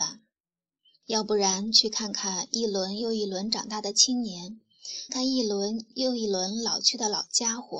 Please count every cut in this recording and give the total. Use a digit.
2